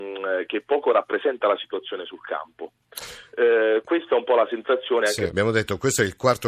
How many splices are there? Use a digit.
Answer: 1